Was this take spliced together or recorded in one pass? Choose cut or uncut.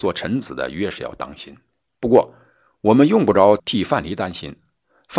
cut